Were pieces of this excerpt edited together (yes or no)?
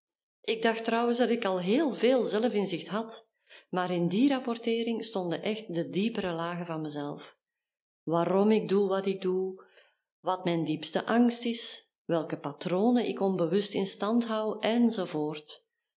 no